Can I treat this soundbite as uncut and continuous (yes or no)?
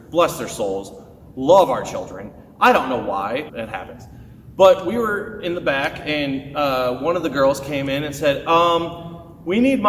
no